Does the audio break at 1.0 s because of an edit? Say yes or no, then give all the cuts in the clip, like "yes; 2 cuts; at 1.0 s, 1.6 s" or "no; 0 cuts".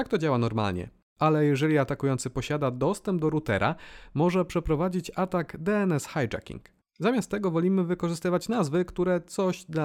no; 1 cut; at 6.8 s